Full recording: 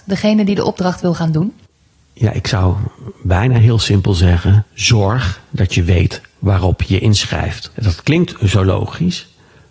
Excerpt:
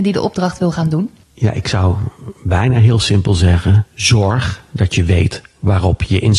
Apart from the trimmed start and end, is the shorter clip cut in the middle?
yes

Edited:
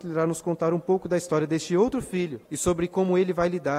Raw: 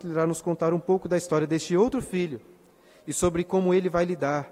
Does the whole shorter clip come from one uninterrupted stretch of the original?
no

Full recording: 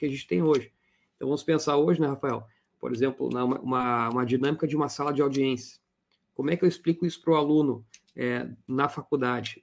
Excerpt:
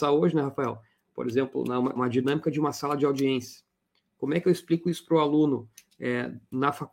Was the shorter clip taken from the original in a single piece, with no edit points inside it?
no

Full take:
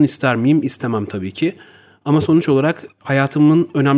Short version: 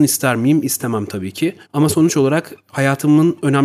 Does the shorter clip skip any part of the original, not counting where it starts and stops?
yes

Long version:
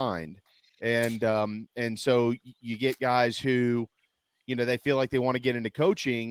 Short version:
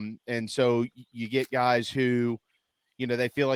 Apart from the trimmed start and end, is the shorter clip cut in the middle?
no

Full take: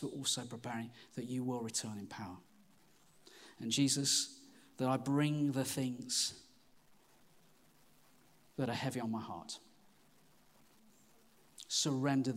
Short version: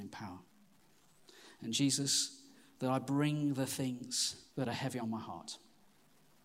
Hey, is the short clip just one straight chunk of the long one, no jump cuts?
no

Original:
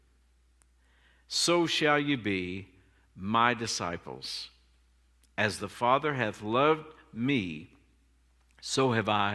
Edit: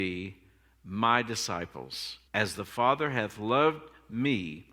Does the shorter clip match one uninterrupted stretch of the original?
no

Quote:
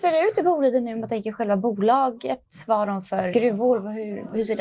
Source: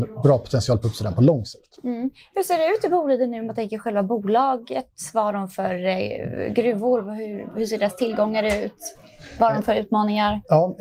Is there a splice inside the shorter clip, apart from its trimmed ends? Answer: yes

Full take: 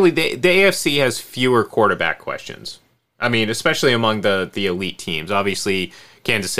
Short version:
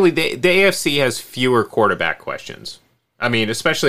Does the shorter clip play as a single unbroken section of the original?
yes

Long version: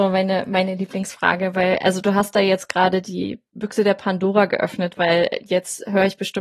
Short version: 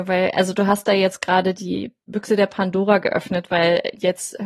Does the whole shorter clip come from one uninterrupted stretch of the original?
yes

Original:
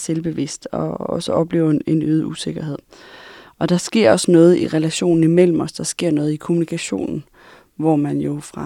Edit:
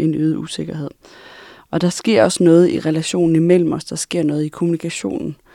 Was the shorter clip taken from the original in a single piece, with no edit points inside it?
yes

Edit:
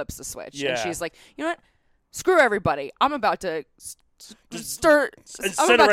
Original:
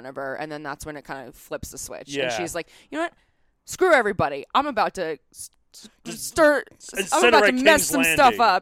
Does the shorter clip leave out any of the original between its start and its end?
no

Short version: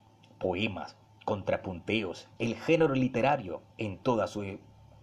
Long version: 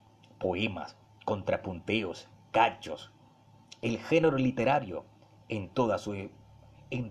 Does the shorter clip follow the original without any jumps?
no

